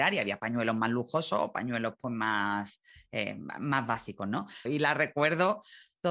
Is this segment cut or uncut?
cut